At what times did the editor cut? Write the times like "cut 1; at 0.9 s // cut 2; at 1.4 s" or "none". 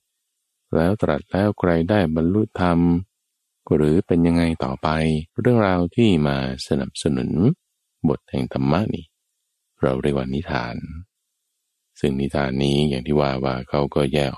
cut 1; at 5.3 s